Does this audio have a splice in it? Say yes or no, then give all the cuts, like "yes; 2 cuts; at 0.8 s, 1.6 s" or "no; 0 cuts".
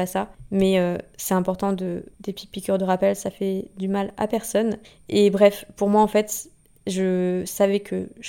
no; 0 cuts